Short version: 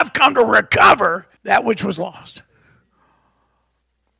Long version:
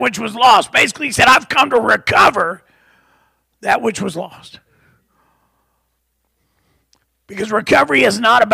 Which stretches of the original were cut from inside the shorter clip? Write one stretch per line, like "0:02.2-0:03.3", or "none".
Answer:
0:02.7-0:03.5